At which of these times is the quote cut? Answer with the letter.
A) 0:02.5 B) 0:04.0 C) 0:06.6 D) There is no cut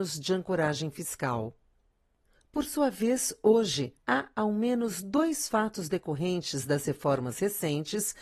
B